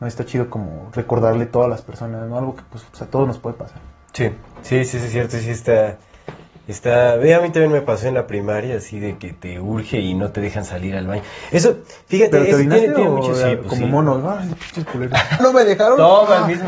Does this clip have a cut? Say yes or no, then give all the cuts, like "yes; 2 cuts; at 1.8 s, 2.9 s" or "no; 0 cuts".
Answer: yes; 2 cuts; at 2.9 s, 15.4 s